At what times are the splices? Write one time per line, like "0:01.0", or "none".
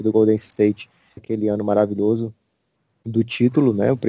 0:01.2